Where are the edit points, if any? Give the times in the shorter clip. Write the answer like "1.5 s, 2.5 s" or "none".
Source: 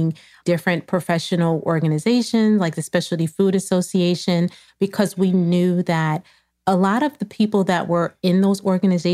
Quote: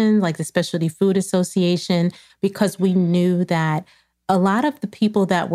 none